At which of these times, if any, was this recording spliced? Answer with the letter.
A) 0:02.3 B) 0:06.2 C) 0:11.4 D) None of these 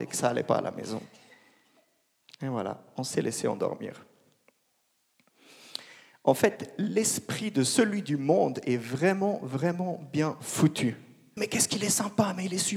C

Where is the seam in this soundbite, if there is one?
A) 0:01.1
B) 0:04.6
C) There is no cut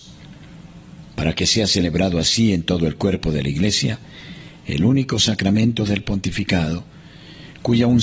C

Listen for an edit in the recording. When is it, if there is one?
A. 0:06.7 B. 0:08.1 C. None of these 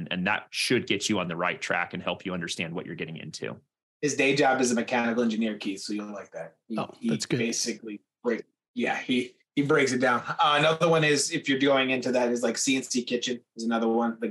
C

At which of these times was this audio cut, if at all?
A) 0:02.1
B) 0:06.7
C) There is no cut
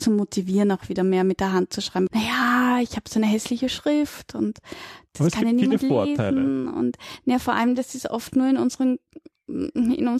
A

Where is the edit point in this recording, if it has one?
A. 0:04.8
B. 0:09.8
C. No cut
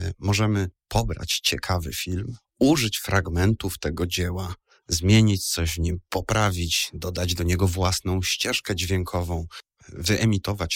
B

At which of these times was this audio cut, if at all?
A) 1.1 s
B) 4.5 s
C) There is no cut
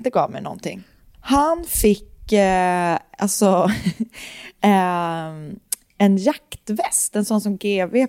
A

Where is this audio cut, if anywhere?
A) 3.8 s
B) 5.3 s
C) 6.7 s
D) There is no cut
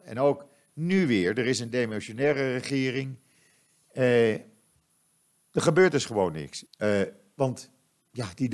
C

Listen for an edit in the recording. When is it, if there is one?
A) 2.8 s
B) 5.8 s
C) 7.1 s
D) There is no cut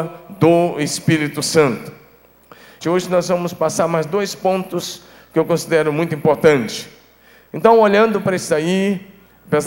A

